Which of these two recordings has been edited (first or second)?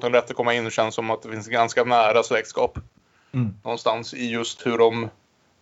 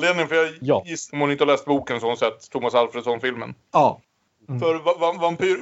second